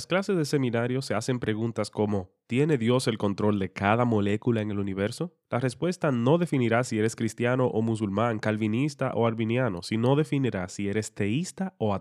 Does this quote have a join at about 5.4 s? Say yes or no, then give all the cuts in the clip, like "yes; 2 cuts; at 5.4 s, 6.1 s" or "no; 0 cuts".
yes; 1 cut; at 5.4 s